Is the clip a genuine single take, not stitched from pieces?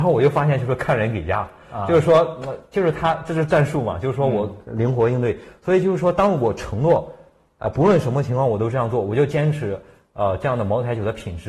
yes; 0 cuts

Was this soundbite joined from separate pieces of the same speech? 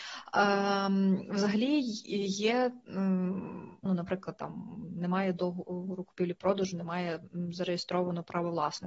yes; 1 cut; at 3.9 s

